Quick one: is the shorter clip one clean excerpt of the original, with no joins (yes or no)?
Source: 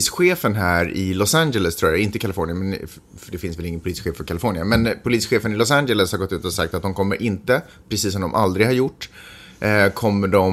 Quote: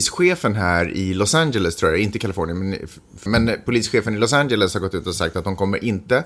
no